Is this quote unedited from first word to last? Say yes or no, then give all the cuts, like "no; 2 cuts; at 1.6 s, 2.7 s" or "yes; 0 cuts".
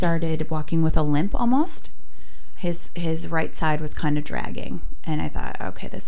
yes; 0 cuts